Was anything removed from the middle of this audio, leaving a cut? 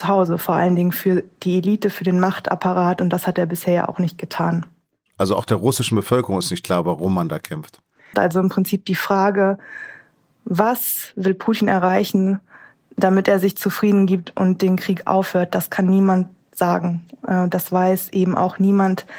yes; 1 cut; at 8.1 s

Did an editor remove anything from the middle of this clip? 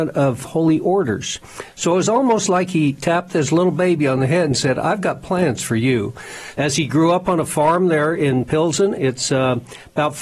yes; 2 cuts; at 6.5 s, 9.0 s

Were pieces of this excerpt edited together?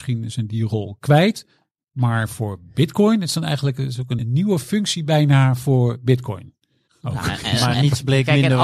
yes; 2 cuts; at 4.2 s, 6.9 s

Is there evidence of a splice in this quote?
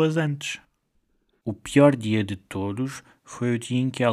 no; 0 cuts

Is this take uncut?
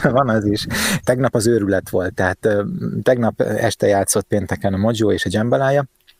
no; 1 cut; at 1.0 s

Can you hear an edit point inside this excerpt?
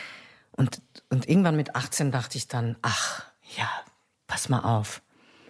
no; 0 cuts

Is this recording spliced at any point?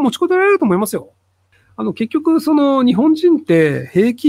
no; 0 cuts

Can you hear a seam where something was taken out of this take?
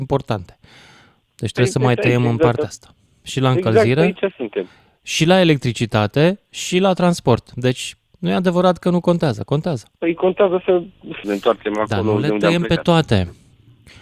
yes; 2 cuts; at 10.0 s, 11.2 s

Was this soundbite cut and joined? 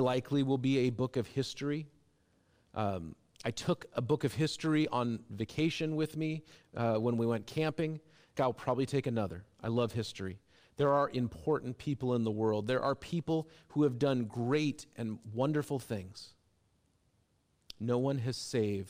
yes; 1 cut; at 8.4 s

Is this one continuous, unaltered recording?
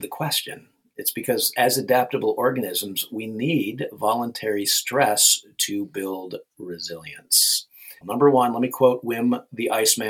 no; 1 cut; at 8.0 s

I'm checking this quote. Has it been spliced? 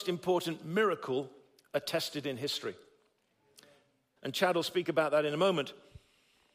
yes; 1 cut; at 4.2 s

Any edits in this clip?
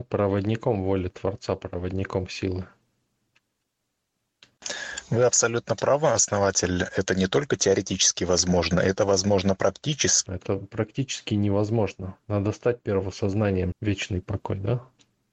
yes; 2 cuts; at 10.3 s, 13.7 s

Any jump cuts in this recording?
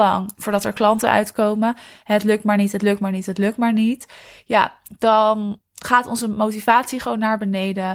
no; 0 cuts

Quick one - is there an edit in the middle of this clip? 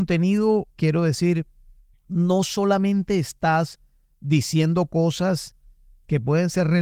no; 0 cuts

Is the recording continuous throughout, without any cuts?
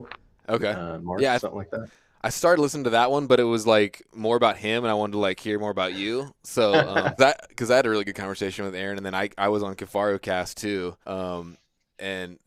no; 2 cuts; at 7.2 s, 11.0 s

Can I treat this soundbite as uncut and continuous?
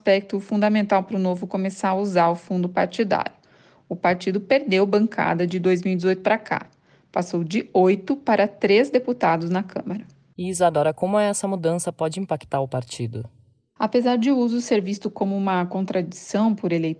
yes; 0 cuts

